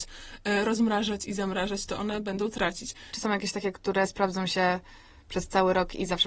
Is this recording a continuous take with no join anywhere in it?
no; 1 cut; at 3.1 s

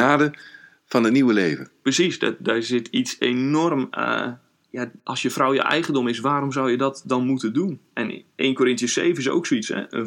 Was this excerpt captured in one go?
yes; 0 cuts

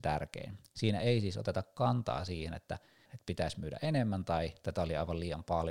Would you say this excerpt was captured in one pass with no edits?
no; 1 cut; at 3.1 s

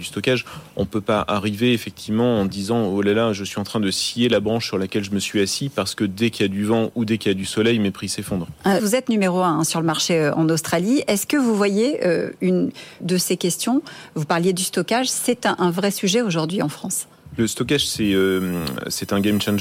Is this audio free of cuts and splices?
no; 2 cuts; at 8.8 s, 13.0 s

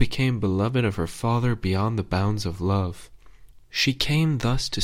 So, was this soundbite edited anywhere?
yes; 1 cut; at 3.6 s

